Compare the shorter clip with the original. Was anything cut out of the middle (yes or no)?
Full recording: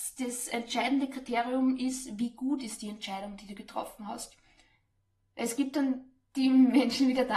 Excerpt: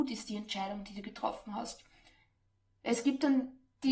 no